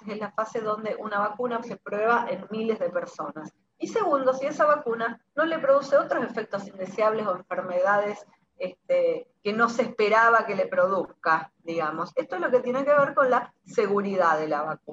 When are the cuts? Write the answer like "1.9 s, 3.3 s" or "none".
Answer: 1.6 s, 3.7 s